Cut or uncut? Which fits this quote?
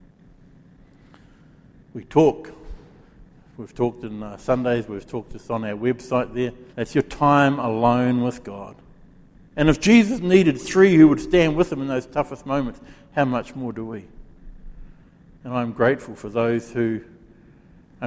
cut